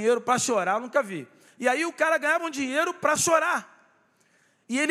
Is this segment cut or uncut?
cut